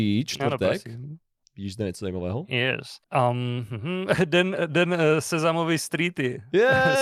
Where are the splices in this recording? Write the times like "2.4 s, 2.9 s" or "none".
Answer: 3.0 s